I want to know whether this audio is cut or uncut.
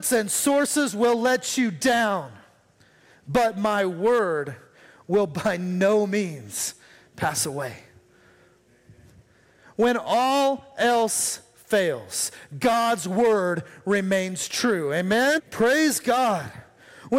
cut